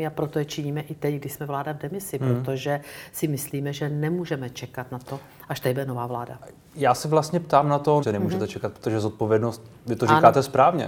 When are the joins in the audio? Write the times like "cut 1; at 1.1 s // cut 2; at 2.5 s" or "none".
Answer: cut 1; at 8.0 s